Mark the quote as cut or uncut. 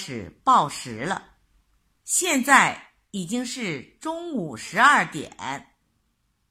uncut